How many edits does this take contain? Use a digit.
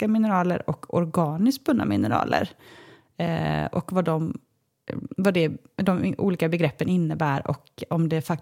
0